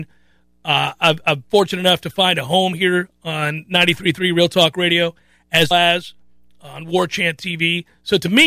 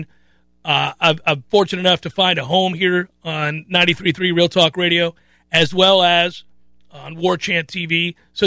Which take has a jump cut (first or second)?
first